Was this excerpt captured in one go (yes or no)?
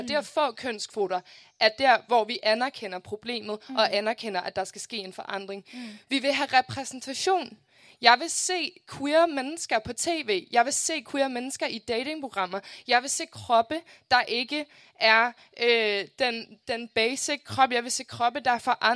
yes